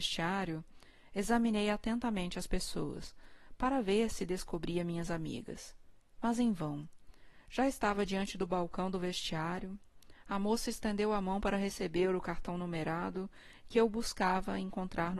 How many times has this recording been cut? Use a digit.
0